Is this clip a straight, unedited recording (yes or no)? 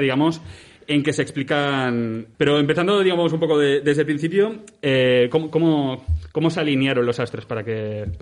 no